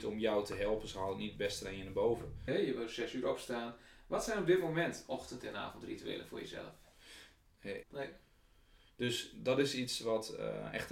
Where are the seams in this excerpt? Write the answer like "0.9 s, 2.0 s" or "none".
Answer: 2.5 s, 7.8 s